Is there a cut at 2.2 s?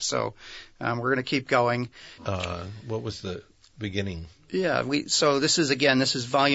yes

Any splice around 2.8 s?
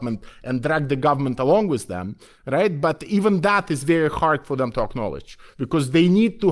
no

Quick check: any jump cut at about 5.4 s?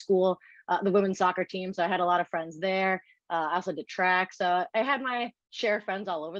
yes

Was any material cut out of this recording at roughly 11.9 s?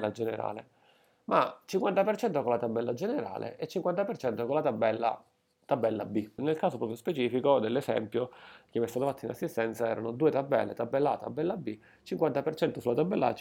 no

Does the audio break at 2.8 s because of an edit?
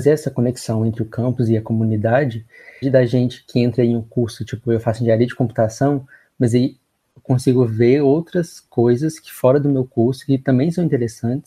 yes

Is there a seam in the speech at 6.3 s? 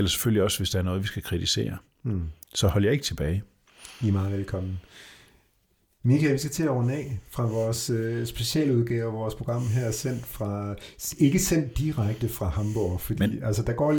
no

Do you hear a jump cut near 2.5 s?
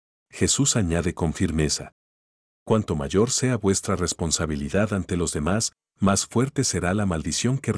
no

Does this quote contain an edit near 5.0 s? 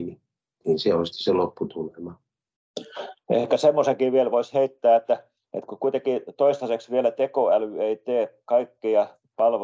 no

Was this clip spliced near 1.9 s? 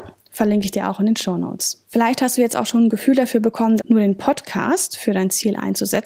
yes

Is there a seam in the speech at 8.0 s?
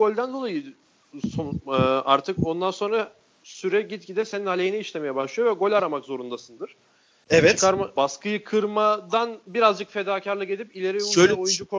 yes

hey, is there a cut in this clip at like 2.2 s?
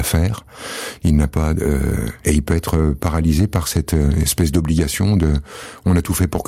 yes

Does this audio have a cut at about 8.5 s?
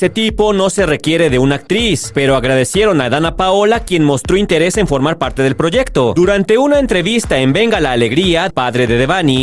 yes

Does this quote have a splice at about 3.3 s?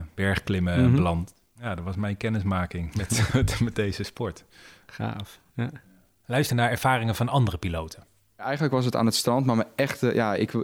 yes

